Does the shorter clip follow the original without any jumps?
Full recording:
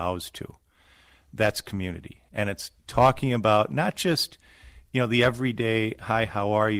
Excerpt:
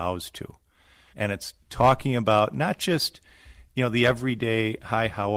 no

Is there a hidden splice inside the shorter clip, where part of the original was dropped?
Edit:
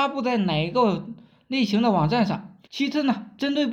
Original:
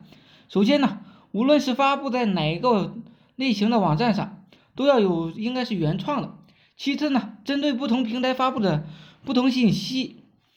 yes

